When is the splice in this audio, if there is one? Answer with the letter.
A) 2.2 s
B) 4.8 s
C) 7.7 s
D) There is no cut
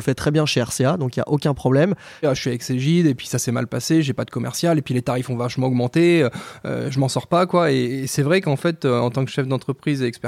A